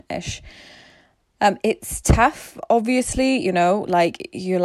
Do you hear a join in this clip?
no; 0 cuts

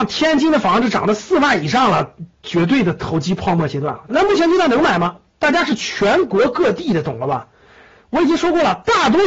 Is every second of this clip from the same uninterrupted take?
no; 1 cut; at 4.1 s

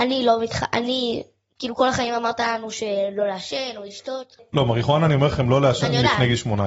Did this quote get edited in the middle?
no; 0 cuts

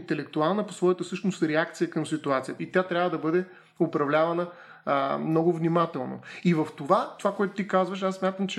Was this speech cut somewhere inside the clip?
yes; 2 cuts; at 2.6 s, 7.2 s

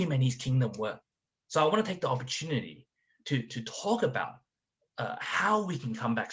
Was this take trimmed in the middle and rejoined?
no; 0 cuts

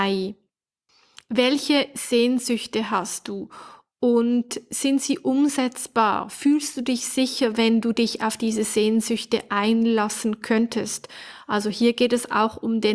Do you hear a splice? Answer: no; 0 cuts

